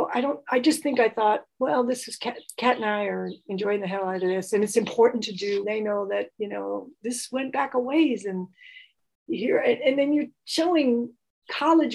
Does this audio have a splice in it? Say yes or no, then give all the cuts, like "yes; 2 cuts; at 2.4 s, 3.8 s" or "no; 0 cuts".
yes; 1 cut; at 5.6 s